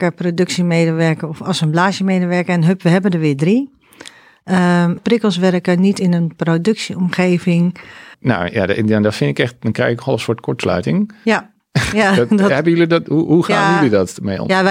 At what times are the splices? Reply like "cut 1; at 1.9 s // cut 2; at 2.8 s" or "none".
cut 1; at 5.0 s // cut 2; at 8.1 s